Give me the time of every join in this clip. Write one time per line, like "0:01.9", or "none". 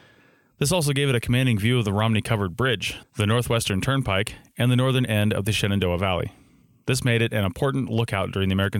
none